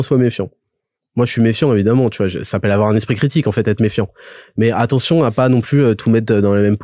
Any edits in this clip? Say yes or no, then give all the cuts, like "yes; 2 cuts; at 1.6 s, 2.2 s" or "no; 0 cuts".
no; 0 cuts